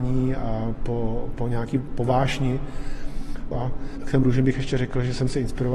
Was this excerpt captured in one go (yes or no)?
no